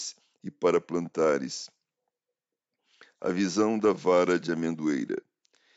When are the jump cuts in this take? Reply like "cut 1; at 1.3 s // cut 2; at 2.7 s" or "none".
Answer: none